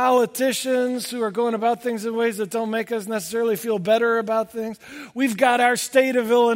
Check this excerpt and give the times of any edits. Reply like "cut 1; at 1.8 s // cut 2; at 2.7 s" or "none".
none